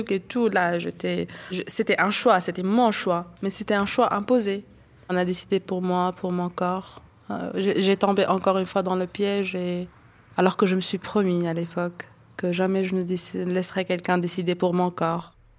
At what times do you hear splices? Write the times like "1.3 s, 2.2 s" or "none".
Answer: none

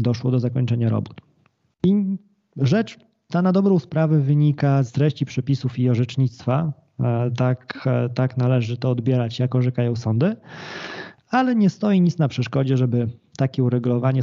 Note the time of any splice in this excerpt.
4.9 s

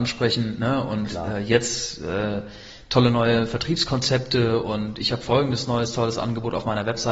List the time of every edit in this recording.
none

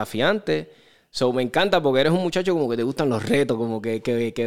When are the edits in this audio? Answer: none

